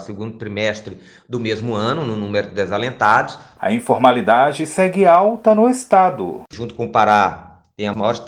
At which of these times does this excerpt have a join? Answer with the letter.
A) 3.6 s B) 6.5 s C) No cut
A